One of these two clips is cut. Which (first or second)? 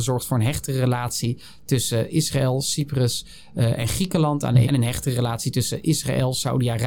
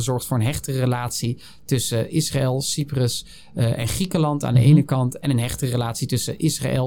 first